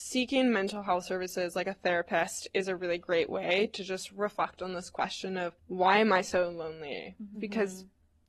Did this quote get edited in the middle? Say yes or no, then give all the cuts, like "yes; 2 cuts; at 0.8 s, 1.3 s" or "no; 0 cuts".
yes; 2 cuts; at 5.6 s, 7.3 s